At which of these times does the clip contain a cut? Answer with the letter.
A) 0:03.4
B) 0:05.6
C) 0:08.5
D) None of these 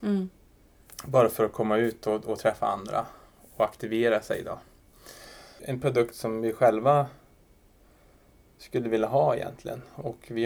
B